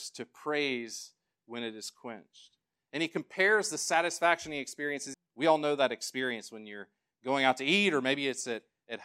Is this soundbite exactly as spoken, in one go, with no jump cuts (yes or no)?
no